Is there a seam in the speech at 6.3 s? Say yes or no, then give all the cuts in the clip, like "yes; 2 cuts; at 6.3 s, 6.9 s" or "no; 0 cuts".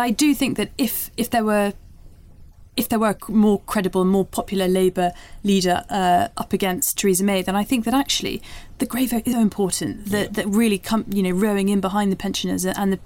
no; 1 cut; at 9.3 s